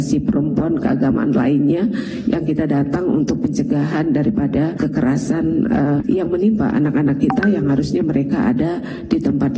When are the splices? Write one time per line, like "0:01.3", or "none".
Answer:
none

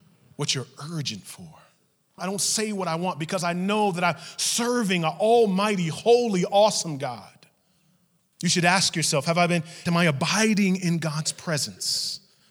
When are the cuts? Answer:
0:02.2
0:08.3
0:09.9

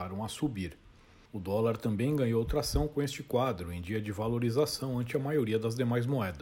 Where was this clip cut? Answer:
0:01.3

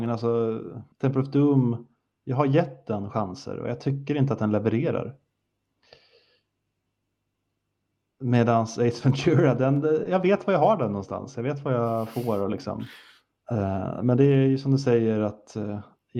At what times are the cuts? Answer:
0:00.9
0:13.4

